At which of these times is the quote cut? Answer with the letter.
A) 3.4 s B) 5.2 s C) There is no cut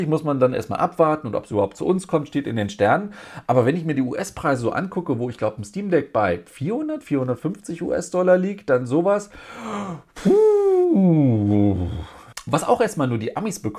C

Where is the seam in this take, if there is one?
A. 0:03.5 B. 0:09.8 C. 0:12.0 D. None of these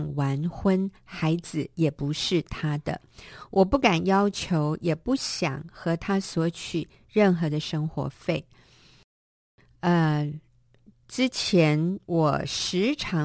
C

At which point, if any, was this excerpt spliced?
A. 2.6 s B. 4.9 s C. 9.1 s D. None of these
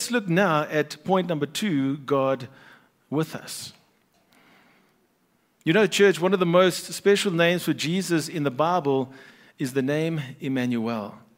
D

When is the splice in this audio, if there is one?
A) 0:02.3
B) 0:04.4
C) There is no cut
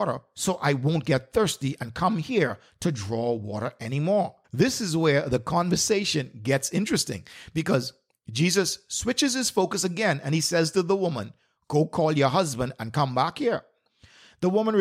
B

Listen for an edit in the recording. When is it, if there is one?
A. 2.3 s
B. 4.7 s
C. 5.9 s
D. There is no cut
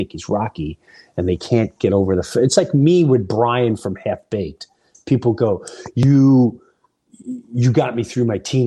D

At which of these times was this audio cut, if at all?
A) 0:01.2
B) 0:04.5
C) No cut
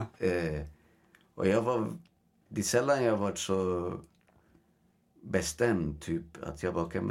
C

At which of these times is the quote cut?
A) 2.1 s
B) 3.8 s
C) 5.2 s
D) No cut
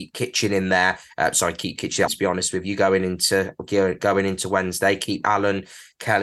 A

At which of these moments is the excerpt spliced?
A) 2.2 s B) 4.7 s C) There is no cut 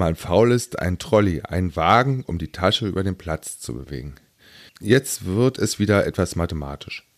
B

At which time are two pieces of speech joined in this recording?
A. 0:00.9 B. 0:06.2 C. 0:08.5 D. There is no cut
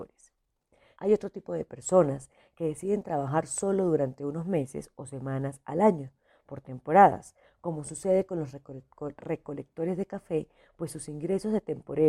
A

